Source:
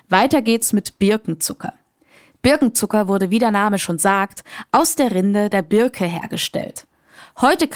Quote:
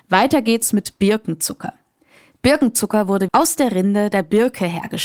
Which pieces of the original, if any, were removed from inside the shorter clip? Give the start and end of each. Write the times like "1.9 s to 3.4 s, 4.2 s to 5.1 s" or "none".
3.3 s to 4.7 s